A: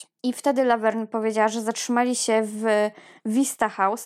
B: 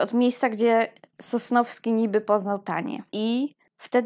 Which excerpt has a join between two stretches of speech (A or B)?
B